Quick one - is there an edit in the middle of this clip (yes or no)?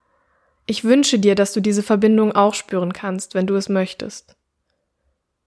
no